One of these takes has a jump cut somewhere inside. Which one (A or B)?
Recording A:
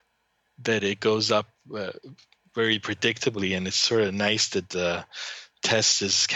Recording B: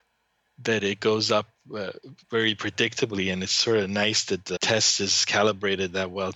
B